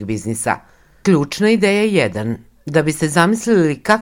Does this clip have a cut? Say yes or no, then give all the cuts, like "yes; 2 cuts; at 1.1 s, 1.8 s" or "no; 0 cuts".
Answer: yes; 1 cut; at 1.0 s